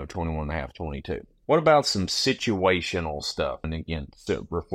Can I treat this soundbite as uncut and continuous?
no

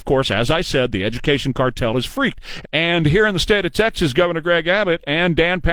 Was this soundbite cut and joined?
yes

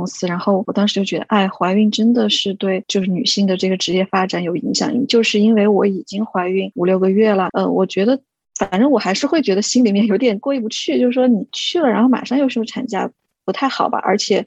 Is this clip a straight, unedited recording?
no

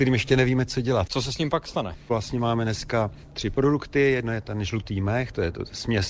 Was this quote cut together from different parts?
yes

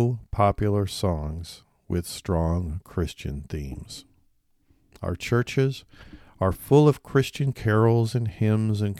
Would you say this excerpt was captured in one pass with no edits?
yes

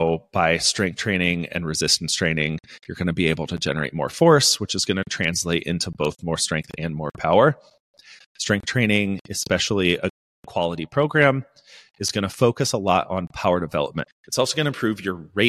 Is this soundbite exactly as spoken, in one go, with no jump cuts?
no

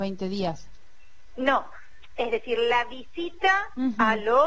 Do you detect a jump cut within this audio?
no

